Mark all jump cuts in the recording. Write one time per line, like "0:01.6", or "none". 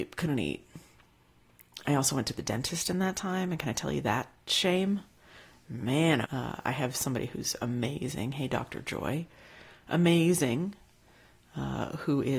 0:06.3